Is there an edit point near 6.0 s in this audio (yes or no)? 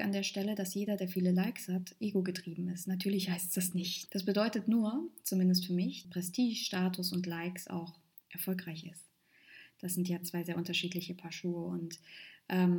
yes